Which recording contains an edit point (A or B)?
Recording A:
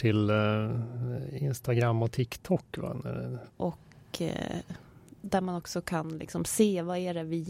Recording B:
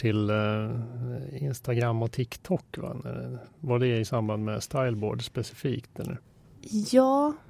A